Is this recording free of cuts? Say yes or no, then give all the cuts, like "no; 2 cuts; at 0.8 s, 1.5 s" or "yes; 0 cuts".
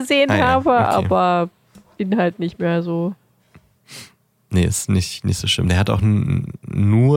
yes; 0 cuts